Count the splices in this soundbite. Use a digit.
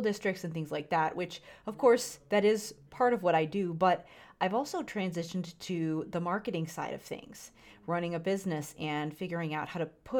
0